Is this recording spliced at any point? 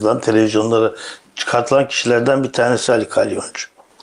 yes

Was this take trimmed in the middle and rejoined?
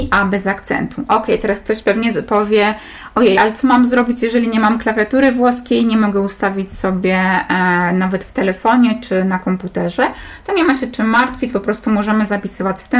no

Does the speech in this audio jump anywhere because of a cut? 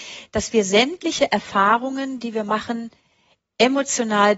no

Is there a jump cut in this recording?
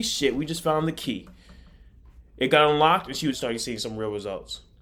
yes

